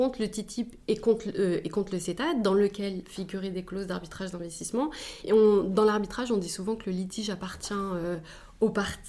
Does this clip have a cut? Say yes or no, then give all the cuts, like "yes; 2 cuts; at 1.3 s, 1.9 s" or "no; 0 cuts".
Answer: yes; 1 cut; at 5.2 s